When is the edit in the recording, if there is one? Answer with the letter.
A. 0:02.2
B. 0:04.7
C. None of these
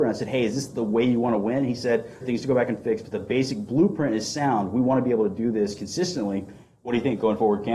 A